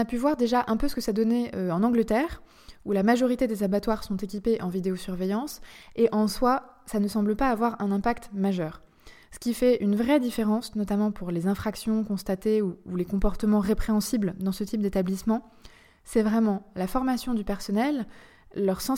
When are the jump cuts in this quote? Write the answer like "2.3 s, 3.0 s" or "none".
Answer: none